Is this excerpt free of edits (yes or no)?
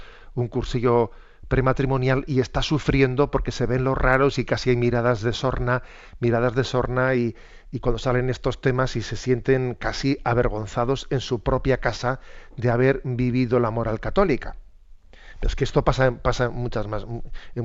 no